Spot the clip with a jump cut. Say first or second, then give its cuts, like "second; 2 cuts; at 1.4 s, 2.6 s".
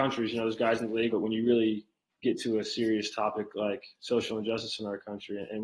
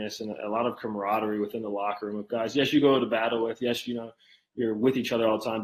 first; 1 cut; at 1.1 s